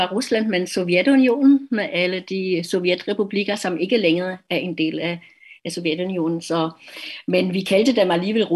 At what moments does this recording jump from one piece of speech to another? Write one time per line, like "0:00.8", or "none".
none